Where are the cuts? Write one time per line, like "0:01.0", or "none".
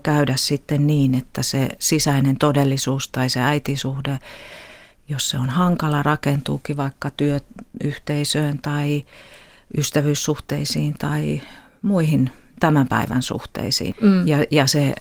0:13.9